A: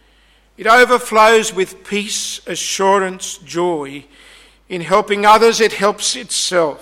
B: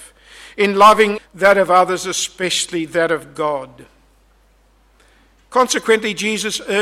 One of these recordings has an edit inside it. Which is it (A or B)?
B